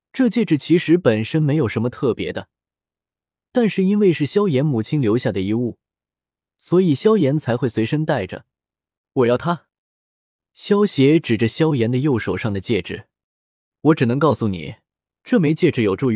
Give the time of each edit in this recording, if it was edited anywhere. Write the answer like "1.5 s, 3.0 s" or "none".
9.0 s, 13.7 s